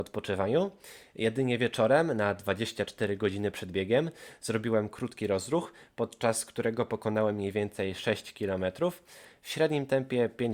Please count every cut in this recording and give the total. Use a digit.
0